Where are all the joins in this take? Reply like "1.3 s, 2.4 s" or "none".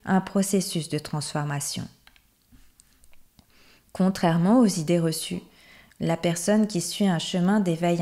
none